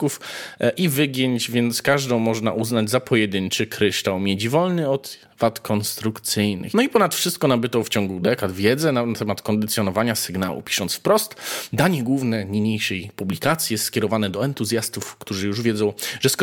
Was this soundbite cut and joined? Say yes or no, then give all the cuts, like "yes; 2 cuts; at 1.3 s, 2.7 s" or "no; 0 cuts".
yes; 1 cut; at 6.7 s